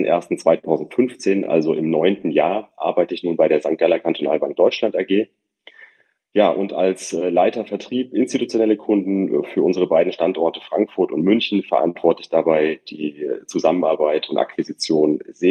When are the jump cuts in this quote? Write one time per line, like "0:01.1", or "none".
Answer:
none